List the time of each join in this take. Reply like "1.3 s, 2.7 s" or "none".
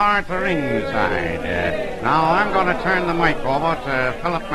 none